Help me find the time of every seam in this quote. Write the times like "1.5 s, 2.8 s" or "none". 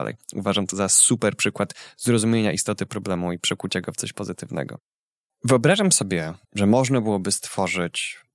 6.4 s